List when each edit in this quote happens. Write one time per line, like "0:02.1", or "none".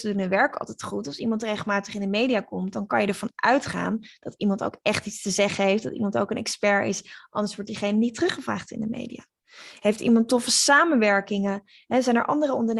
none